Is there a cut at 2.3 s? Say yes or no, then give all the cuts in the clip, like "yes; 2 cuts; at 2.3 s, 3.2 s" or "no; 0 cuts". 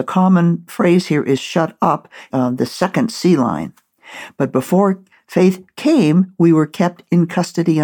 yes; 1 cut; at 2.3 s